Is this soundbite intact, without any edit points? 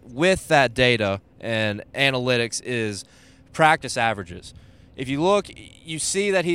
yes; 0 cuts

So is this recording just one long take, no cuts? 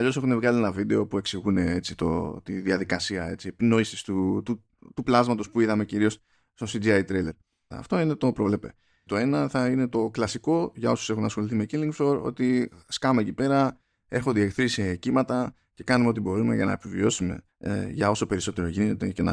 no; 3 cuts; at 7.7 s, 9.1 s, 17.5 s

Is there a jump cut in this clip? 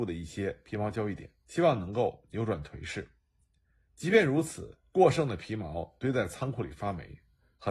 yes; 2 cuts; at 1.4 s, 4.9 s

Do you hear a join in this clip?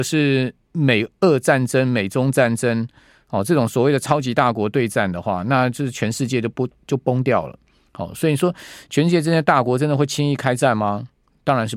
no; 0 cuts

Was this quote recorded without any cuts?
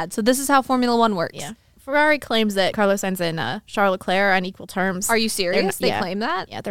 yes; 0 cuts

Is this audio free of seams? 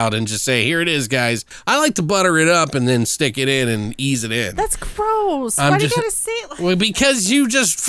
yes; 0 cuts

